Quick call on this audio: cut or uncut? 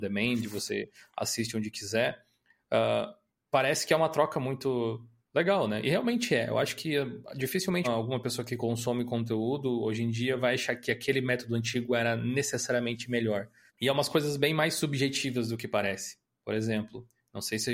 cut